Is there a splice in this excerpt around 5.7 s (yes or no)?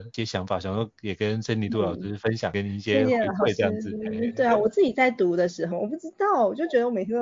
yes